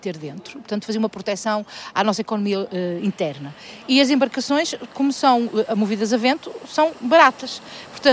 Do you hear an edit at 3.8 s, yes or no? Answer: no